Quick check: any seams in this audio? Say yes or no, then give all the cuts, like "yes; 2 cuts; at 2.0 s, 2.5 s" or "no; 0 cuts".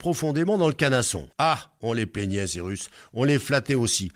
yes; 1 cut; at 1.3 s